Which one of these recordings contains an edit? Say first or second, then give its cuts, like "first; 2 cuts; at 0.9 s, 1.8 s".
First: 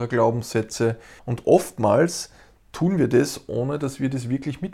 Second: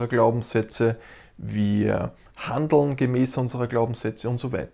first; 1 cut; at 1.2 s